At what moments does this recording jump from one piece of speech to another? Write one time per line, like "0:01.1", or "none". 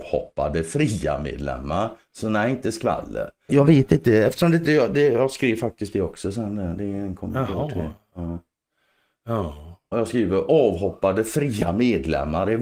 0:03.5
0:09.9